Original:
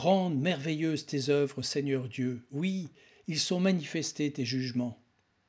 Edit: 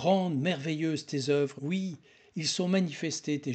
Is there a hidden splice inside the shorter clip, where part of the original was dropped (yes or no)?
yes